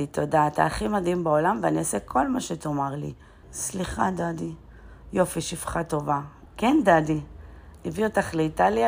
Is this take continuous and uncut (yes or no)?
no